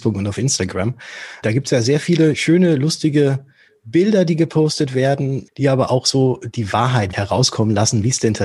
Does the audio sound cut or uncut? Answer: cut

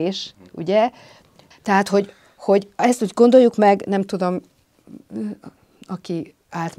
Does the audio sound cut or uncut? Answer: cut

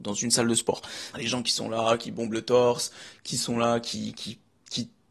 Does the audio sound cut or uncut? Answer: cut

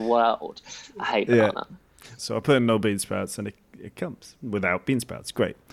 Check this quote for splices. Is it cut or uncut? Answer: cut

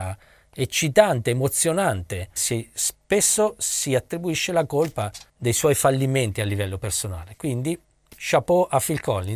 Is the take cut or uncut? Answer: cut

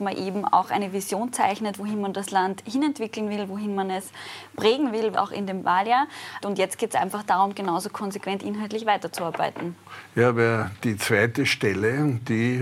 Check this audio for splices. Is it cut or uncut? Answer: cut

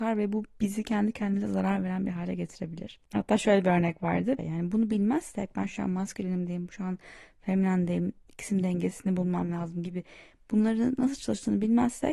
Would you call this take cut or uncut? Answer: cut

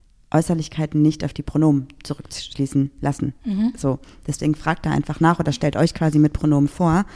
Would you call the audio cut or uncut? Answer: uncut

